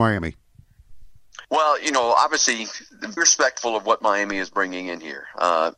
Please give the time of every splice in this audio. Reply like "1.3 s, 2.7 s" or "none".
1.4 s, 3.2 s